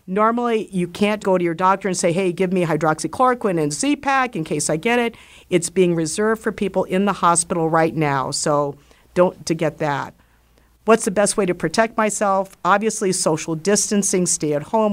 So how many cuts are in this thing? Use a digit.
2